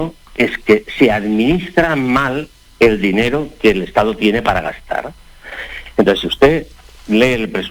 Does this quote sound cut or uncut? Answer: uncut